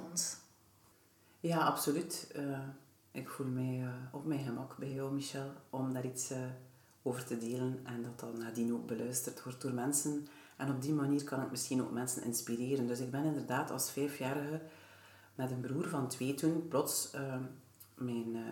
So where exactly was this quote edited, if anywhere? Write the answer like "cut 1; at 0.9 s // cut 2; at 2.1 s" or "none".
none